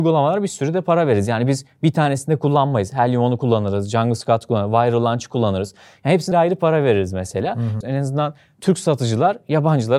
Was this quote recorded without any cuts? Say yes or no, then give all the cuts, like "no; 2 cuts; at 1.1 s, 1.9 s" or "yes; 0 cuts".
no; 2 cuts; at 6.3 s, 7.8 s